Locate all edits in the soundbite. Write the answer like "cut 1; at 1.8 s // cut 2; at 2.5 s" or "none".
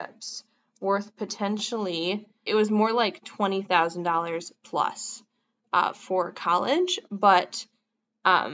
cut 1; at 2.5 s

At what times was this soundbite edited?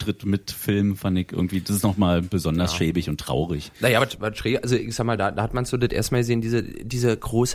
none

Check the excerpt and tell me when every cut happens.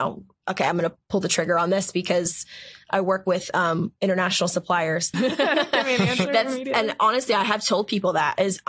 cut 1; at 5.1 s

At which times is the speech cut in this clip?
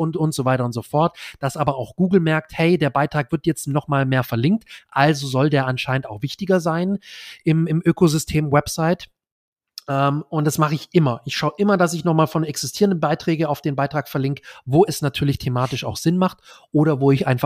none

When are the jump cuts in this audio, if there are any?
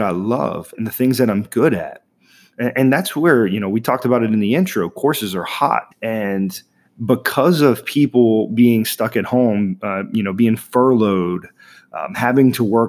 cut 1; at 5.9 s

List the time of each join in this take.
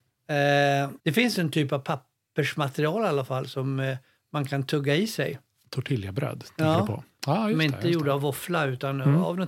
cut 1; at 1.0 s // cut 2; at 7.2 s

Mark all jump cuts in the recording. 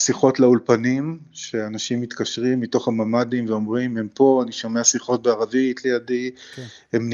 none

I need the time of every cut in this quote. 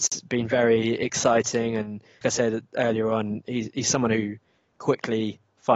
cut 1; at 2.2 s

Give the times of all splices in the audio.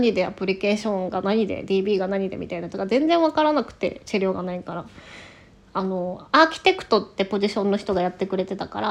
cut 1; at 5.6 s

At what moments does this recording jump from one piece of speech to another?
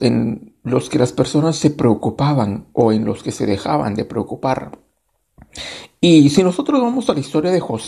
none

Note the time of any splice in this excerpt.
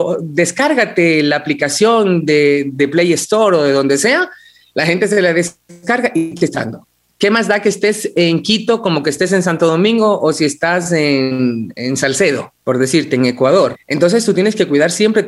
cut 1; at 12.6 s // cut 2; at 13.7 s

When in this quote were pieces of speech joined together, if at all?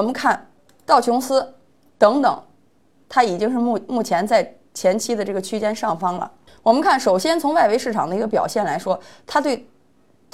cut 1; at 6.5 s

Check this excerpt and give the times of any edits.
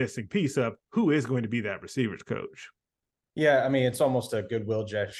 none

